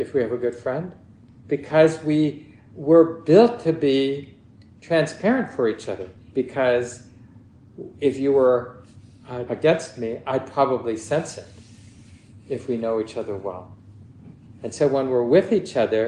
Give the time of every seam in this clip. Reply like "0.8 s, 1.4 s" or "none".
6.3 s, 9.5 s